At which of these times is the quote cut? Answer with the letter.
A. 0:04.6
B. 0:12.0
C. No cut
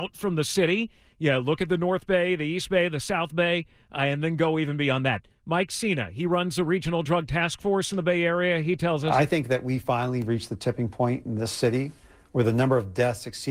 C